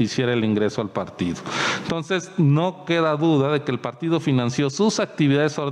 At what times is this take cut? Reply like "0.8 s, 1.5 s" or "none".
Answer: none

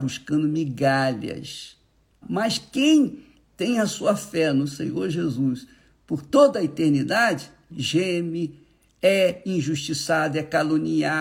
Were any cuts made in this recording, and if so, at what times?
2.2 s, 7.7 s

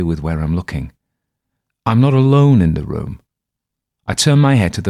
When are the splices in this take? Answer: none

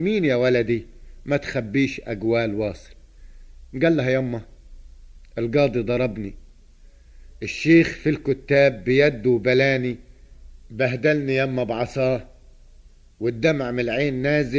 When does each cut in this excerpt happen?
none

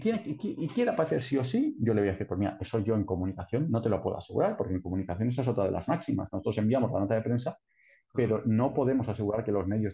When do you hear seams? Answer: none

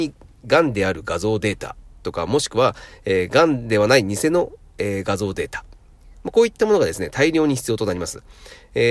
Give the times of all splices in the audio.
none

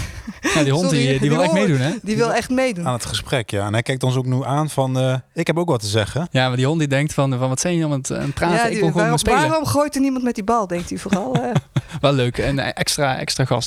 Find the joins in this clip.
none

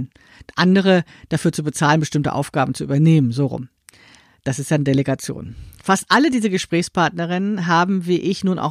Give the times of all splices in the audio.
none

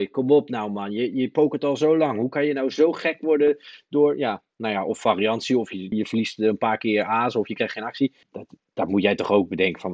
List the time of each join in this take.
5.9 s, 8.2 s

